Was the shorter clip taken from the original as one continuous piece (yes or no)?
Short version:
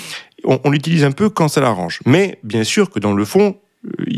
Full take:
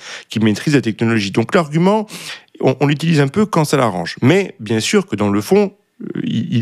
yes